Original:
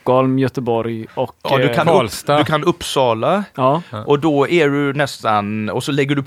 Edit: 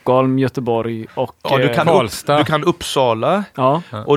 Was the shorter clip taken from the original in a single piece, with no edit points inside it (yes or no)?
yes